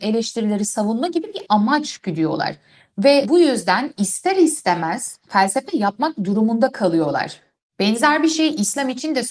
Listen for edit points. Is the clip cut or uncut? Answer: uncut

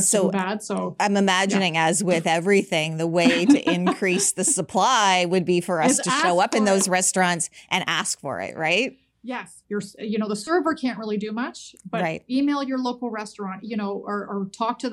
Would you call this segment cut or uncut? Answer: cut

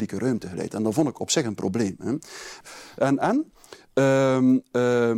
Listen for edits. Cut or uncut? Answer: cut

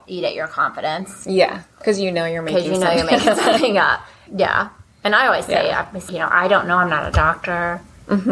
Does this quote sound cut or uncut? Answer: cut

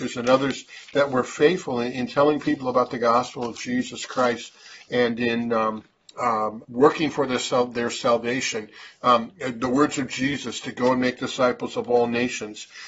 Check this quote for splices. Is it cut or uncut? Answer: cut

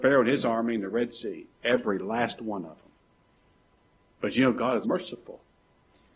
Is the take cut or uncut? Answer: cut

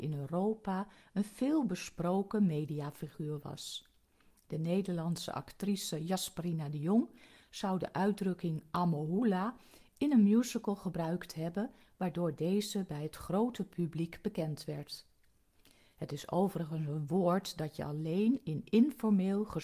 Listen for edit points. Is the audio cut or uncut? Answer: uncut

